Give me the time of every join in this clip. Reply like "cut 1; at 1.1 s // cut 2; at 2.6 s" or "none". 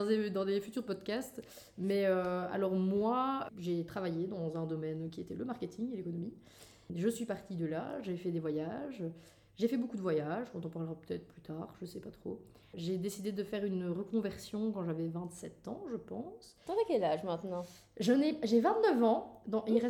none